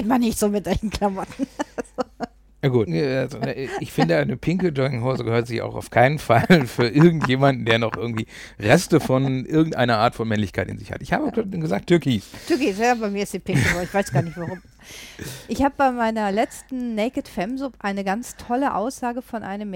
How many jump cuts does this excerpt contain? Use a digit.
1